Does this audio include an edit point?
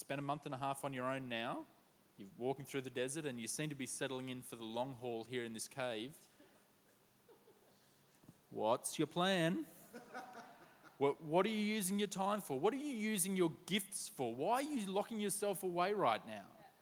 no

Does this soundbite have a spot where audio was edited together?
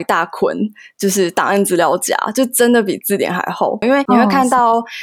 yes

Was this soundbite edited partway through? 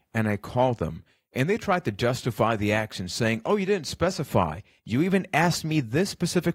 yes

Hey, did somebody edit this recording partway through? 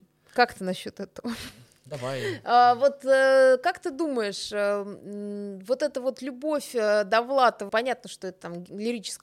yes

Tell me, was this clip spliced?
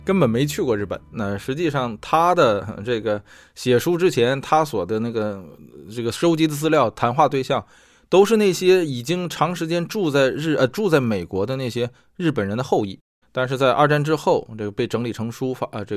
yes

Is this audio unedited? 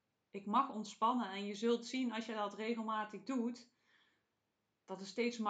yes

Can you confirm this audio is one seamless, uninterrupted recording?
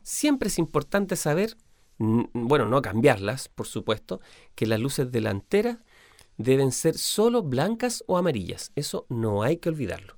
yes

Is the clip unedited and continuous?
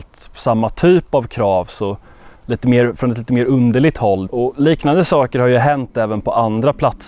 no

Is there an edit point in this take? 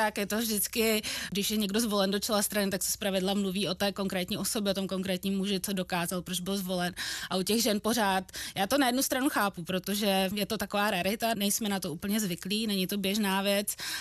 no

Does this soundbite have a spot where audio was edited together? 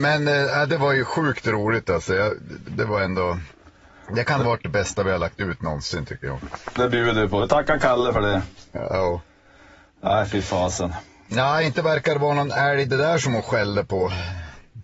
yes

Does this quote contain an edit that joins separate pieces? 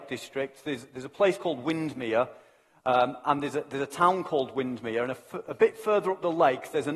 no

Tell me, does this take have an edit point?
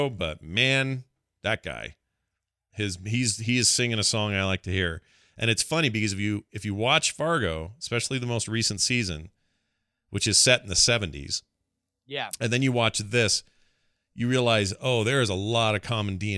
no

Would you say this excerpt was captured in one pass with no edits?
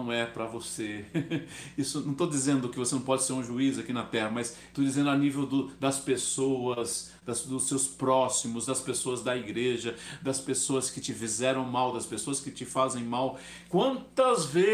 yes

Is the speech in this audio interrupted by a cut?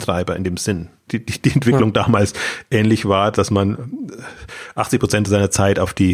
yes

